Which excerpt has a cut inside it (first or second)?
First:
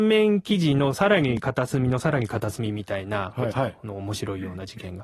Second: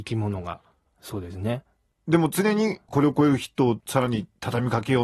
first